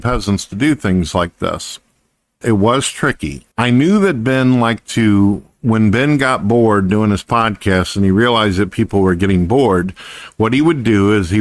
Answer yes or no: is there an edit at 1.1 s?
no